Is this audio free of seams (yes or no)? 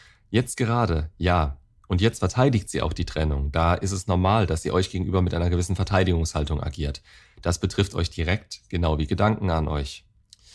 yes